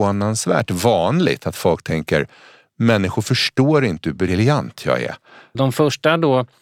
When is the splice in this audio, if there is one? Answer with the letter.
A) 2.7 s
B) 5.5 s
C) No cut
B